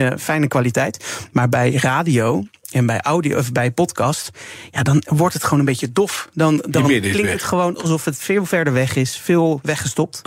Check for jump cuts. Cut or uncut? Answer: uncut